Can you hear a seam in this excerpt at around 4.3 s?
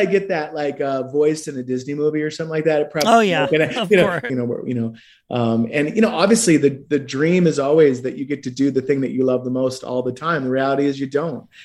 yes; 1 cut; at 4.3 s

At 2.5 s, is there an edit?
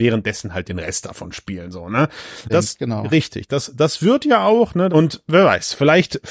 yes; 2 cuts; at 2.5 s, 4.9 s

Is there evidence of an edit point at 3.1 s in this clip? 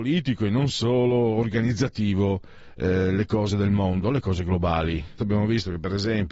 no; 1 cut; at 5.2 s

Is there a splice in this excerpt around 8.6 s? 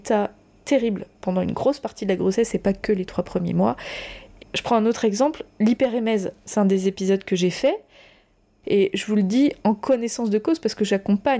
yes; 2 cuts; at 4.4 s, 8.6 s

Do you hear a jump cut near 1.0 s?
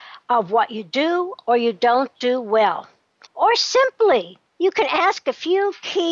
no; 2 cuts; at 3.3 s, 4.5 s

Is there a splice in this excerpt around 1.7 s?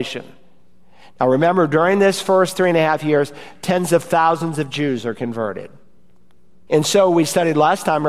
no; 1 cut; at 6.7 s

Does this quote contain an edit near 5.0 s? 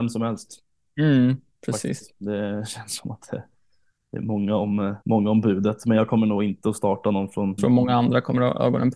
yes; 2 cuts; at 5.0 s, 7.6 s

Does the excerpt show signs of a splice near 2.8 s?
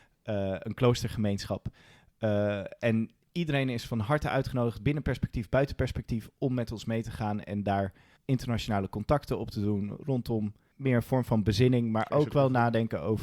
no; 2 cuts; at 8.2 s, 10.7 s

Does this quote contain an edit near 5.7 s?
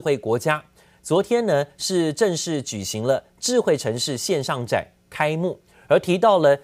yes; 1 cut; at 5.7 s

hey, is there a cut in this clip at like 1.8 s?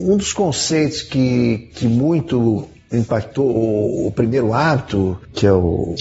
no; 0 cuts

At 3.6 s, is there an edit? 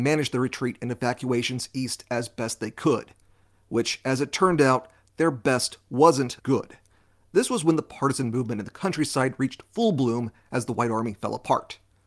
no; 1 cut; at 6.4 s

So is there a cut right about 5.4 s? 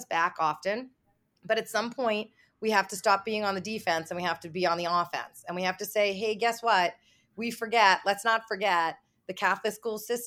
no; 0 cuts

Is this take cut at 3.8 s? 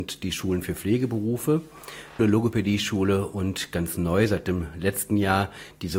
no; 1 cut; at 2.2 s

